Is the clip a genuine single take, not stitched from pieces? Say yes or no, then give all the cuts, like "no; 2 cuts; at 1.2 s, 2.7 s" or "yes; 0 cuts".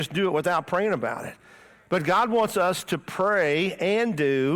yes; 0 cuts